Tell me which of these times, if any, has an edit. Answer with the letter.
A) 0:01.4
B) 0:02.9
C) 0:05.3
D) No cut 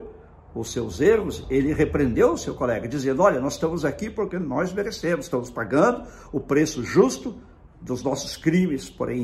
D